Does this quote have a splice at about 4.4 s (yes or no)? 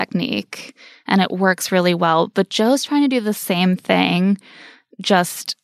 no